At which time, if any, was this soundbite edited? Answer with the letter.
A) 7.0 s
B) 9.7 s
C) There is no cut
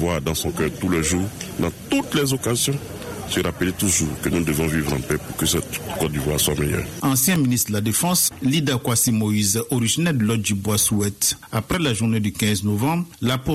C